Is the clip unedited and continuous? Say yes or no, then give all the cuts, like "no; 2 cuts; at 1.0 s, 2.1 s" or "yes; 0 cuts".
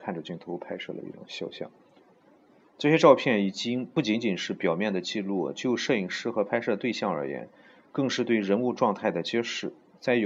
yes; 0 cuts